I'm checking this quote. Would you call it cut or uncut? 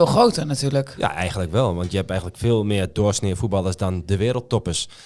uncut